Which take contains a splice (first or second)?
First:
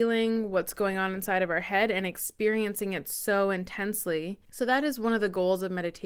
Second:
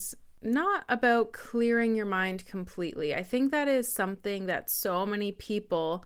first